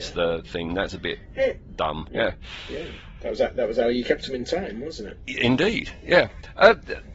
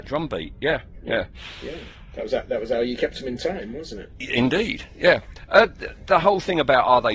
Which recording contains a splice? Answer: first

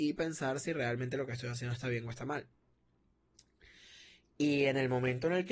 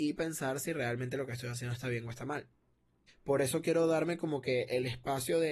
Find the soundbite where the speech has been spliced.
second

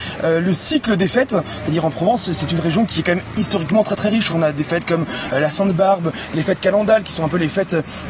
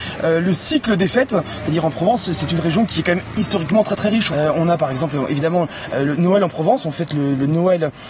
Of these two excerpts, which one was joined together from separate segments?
second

